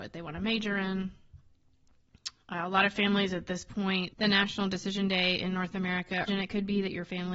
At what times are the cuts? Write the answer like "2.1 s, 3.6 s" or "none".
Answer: 4.1 s, 6.3 s